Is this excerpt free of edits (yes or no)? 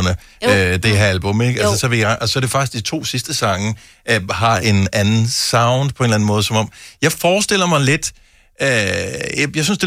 yes